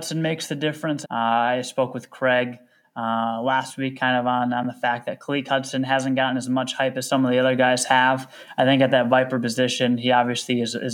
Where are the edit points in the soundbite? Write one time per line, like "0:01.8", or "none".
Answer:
0:01.0